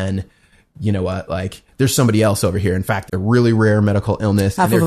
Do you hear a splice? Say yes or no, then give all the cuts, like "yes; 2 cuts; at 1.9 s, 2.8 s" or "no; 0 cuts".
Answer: yes; 1 cut; at 3.1 s